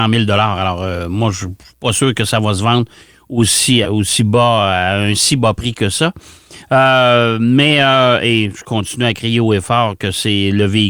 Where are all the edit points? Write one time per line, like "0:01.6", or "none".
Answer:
0:03.8